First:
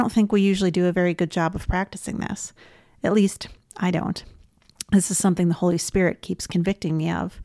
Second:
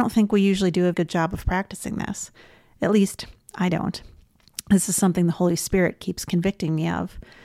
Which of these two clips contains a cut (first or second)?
second